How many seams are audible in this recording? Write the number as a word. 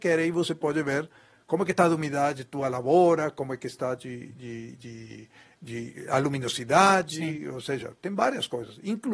zero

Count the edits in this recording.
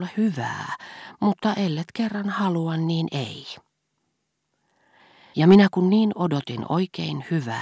one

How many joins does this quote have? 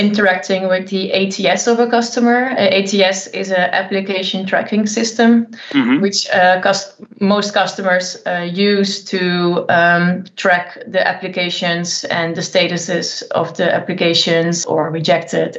one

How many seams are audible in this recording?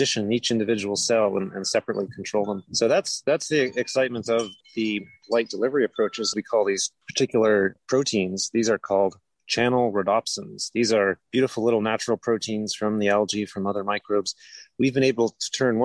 two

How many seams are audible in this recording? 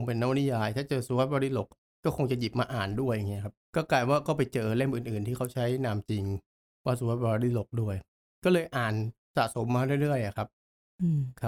one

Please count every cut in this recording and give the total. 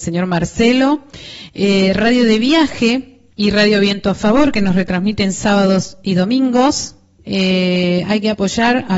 two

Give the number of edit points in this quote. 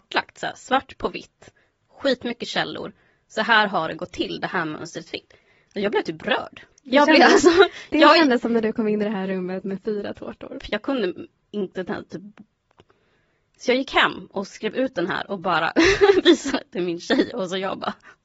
two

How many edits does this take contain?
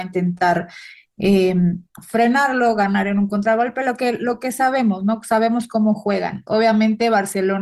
one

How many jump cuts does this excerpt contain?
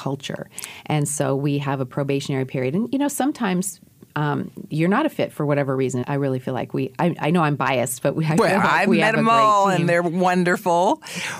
two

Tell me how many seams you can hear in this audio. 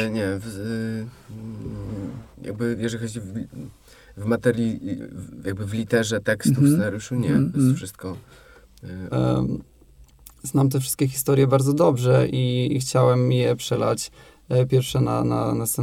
two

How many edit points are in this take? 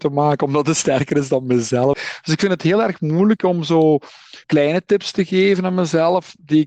two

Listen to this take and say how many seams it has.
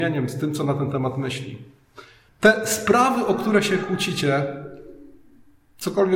one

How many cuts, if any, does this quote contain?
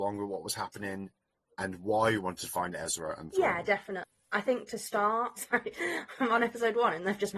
two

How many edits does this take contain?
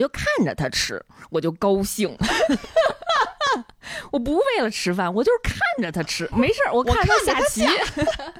one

